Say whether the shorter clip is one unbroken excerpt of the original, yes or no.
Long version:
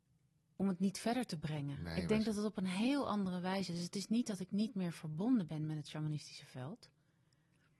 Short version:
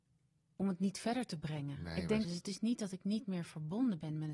no